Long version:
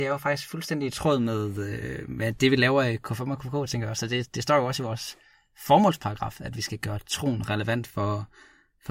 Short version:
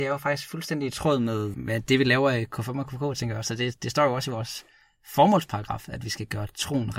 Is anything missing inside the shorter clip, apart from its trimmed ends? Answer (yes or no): yes